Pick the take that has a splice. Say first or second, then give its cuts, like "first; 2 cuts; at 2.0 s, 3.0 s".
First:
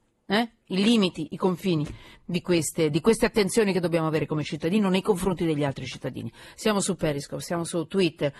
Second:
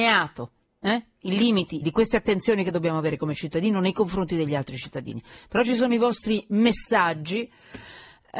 second; 2 cuts; at 1.8 s, 5.4 s